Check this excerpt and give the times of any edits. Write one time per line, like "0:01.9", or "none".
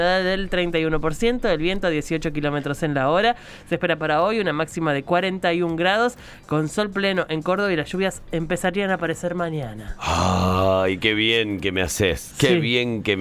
none